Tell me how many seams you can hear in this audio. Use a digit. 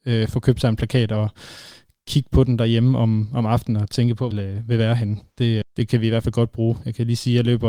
2